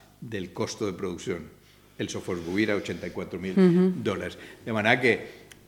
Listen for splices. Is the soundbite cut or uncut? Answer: uncut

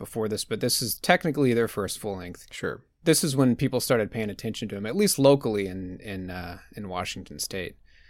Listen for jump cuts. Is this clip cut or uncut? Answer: uncut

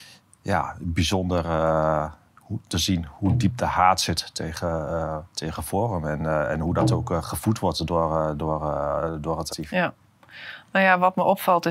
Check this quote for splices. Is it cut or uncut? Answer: cut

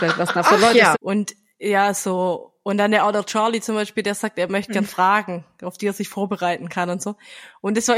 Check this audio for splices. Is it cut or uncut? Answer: cut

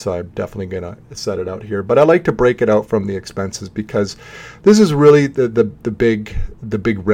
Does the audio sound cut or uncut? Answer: uncut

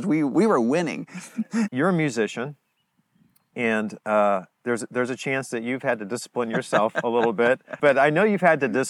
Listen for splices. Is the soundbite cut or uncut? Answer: cut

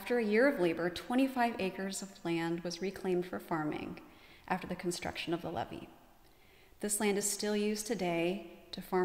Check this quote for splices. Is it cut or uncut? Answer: uncut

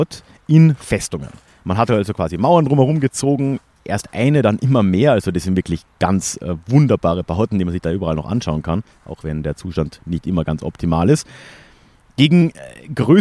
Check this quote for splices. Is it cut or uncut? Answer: uncut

